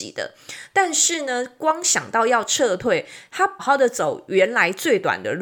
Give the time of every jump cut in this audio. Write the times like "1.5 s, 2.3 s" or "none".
3.6 s